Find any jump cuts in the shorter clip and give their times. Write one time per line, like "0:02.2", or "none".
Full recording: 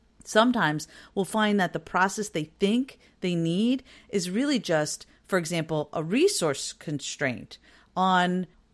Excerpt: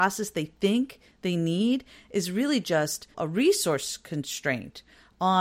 0:03.1